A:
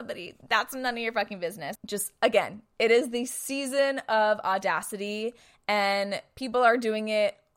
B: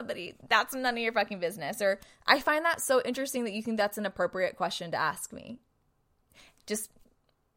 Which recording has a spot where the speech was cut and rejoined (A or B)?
A